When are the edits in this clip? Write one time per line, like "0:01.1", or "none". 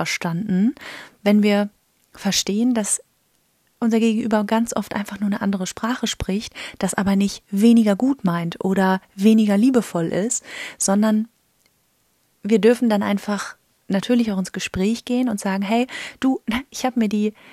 none

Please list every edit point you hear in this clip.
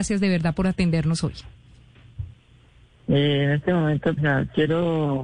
0:04.2

